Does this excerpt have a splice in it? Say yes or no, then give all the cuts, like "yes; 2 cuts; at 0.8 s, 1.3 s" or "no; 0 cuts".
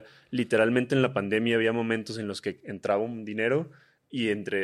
no; 0 cuts